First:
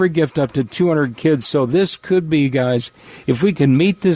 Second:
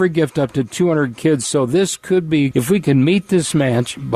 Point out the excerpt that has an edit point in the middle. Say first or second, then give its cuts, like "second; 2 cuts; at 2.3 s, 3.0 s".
second; 1 cut; at 2.5 s